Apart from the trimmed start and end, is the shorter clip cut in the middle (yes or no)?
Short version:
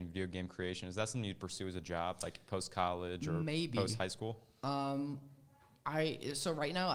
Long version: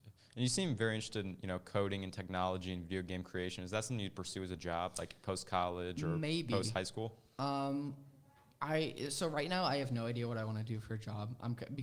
no